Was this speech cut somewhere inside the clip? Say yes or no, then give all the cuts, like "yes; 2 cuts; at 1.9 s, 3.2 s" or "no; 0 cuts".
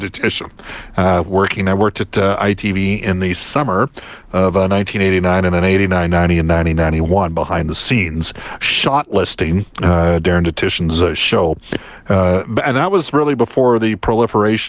no; 0 cuts